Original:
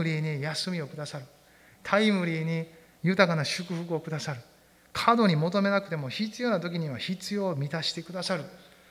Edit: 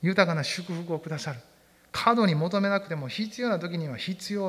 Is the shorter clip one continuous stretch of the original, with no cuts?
yes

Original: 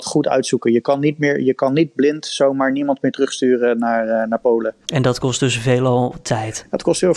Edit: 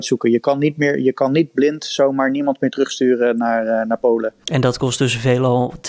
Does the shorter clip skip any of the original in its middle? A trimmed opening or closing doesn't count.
no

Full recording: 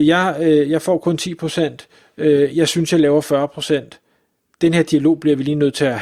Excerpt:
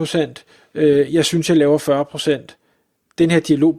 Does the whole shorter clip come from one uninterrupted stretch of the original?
yes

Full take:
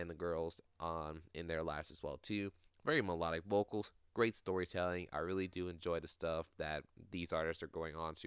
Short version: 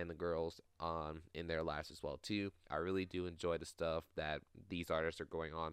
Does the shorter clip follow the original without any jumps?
no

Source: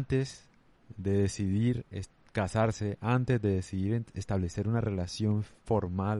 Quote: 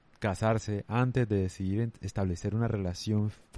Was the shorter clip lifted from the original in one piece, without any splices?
yes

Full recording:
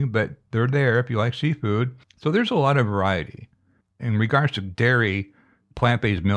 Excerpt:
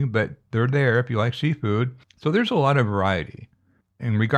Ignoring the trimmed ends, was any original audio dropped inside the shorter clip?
no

